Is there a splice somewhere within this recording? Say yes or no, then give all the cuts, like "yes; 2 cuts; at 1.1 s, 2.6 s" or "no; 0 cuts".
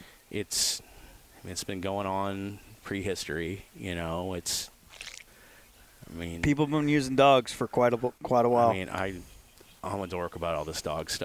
no; 0 cuts